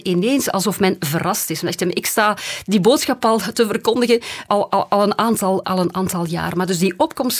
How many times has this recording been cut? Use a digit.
2